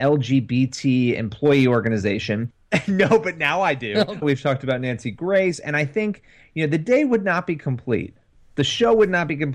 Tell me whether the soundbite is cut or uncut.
cut